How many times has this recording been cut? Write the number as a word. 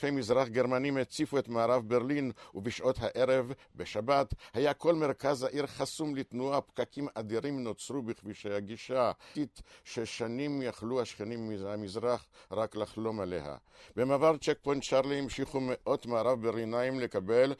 one